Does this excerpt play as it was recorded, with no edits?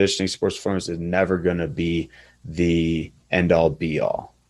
yes; 0 cuts

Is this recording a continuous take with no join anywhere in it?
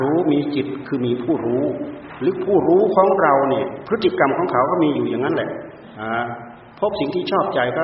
no; 1 cut; at 6.7 s

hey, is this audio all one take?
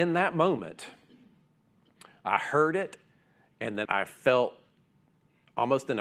no; 1 cut; at 3.8 s

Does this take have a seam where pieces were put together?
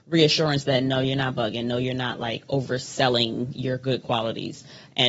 no; 0 cuts

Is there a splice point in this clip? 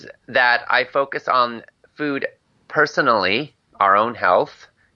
no; 0 cuts

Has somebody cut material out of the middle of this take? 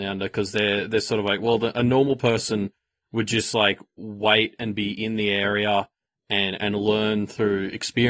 no; 0 cuts

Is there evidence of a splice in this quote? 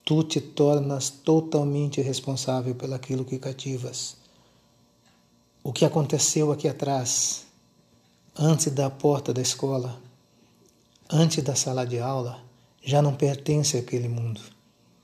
no; 0 cuts

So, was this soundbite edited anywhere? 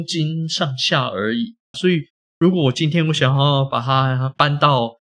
yes; 1 cut; at 1.7 s

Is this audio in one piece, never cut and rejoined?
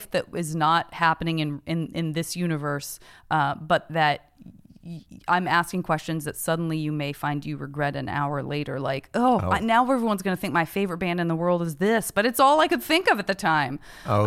yes; 0 cuts

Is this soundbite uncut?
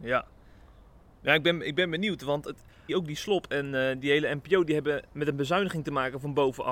no; 1 cut; at 2.9 s

